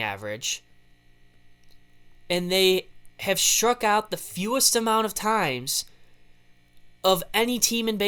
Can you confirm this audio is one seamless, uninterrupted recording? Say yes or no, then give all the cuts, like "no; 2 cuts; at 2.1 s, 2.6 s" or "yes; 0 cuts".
yes; 0 cuts